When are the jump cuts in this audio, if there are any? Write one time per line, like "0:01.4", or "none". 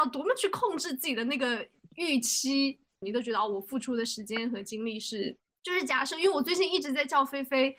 0:03.0
0:05.6